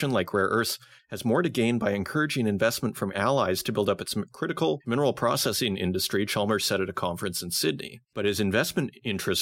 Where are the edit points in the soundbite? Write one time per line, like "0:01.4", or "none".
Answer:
0:08.0